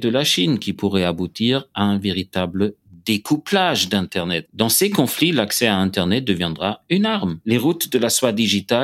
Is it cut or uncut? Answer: cut